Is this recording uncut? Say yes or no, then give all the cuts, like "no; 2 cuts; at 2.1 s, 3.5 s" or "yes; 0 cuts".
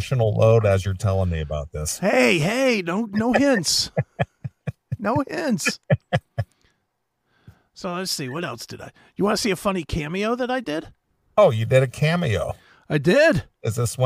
yes; 0 cuts